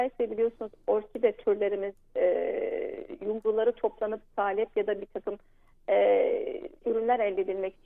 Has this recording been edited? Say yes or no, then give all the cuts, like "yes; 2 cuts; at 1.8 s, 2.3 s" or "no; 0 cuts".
yes; 1 cut; at 6.8 s